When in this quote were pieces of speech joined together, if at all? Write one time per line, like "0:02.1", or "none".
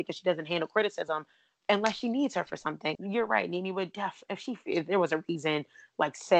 0:03.0